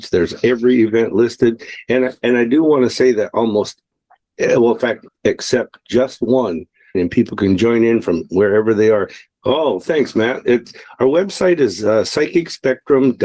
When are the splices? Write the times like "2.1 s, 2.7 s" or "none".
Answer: 5.1 s, 6.9 s, 9.3 s